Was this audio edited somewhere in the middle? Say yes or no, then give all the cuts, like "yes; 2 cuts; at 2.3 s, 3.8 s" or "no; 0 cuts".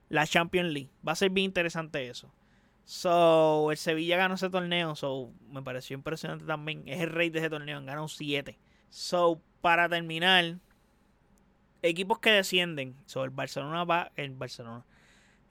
yes; 3 cuts; at 8.8 s, 11.7 s, 13.1 s